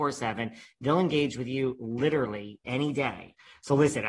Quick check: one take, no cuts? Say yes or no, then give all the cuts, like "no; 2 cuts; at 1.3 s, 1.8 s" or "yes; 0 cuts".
no; 1 cut; at 2.6 s